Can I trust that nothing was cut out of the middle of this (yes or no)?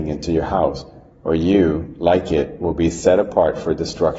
yes